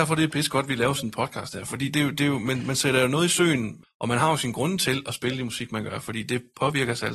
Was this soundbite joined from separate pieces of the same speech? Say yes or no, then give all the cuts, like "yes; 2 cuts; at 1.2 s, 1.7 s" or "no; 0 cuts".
yes; 1 cut; at 3.8 s